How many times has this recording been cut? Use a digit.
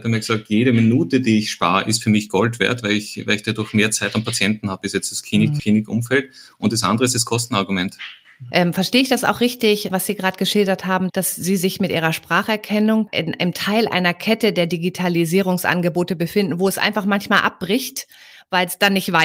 1